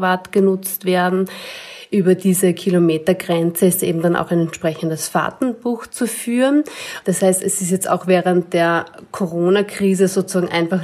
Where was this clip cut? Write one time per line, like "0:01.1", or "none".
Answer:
0:07.0